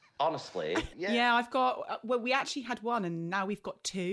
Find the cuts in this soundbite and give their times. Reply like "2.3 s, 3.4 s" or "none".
0.9 s